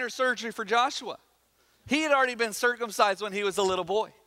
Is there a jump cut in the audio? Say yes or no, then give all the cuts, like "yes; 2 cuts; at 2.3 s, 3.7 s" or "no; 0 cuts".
no; 0 cuts